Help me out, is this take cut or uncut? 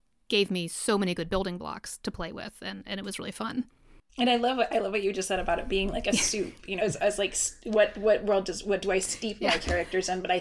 cut